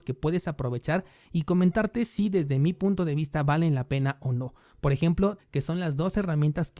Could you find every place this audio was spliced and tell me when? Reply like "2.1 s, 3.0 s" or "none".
5.4 s